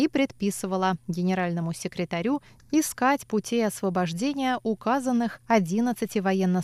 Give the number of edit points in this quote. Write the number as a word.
one